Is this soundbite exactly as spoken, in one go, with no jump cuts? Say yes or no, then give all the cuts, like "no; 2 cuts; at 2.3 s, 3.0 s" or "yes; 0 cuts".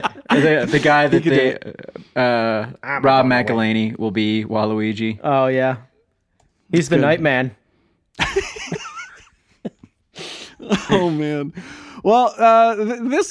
yes; 0 cuts